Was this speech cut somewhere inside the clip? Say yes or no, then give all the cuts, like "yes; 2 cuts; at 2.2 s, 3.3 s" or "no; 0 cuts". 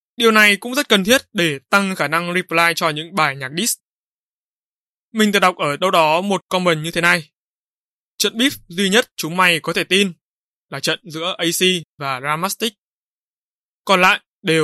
no; 0 cuts